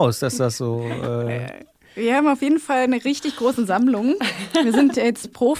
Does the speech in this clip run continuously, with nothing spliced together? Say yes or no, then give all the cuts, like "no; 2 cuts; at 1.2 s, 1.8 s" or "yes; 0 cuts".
yes; 0 cuts